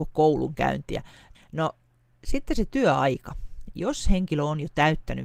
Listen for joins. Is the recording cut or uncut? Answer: cut